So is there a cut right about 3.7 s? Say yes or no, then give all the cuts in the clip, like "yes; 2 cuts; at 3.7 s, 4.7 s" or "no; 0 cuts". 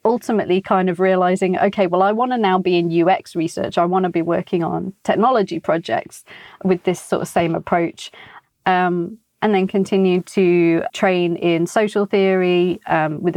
no; 2 cuts; at 8.4 s, 10.9 s